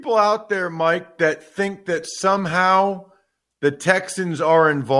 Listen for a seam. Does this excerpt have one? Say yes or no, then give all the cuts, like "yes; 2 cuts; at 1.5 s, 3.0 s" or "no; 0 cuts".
no; 0 cuts